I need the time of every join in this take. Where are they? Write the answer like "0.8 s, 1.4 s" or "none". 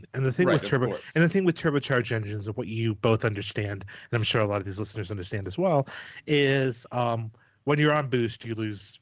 none